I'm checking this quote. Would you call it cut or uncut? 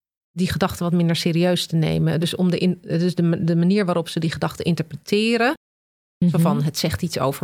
uncut